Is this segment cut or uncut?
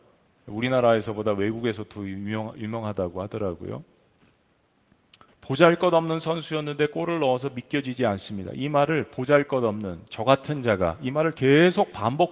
cut